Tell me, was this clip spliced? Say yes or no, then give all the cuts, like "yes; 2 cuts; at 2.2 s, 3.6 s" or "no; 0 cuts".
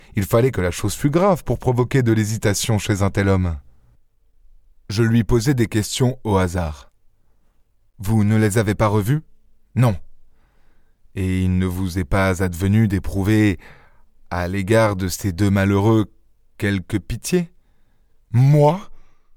no; 0 cuts